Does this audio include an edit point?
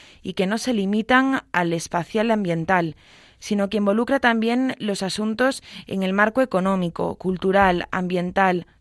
no; 0 cuts

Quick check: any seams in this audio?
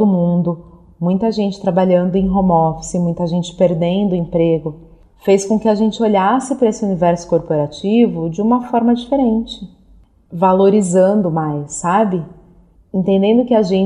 no; 0 cuts

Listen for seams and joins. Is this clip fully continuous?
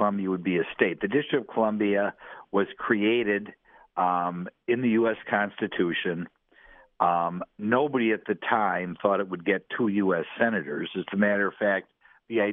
yes; 0 cuts

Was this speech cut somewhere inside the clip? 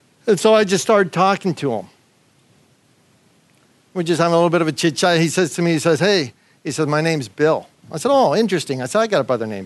no; 0 cuts

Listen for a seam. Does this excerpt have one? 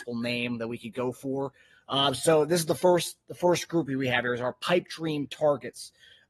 no; 0 cuts

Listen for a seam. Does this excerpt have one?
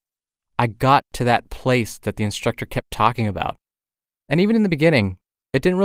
yes; 1 cut; at 4.1 s

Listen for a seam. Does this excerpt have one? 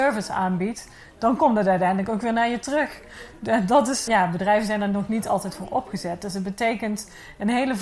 yes; 1 cut; at 4.1 s

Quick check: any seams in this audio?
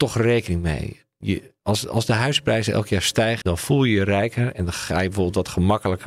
yes; 1 cut; at 3.4 s

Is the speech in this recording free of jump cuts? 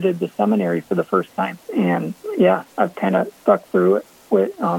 no; 1 cut; at 1.6 s

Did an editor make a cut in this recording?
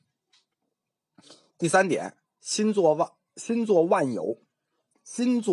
no; 0 cuts

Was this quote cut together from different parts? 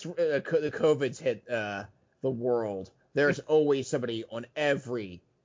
no; 0 cuts

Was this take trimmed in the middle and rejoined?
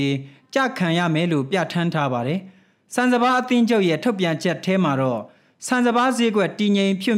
no; 0 cuts

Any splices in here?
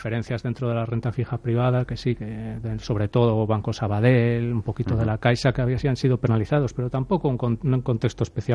no; 0 cuts

